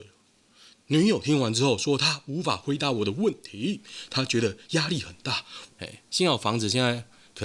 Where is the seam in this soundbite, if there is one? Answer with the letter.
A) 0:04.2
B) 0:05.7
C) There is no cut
B